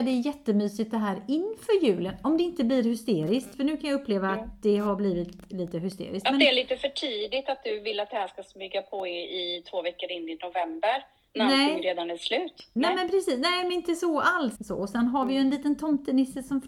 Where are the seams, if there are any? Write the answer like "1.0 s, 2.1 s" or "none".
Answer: 14.5 s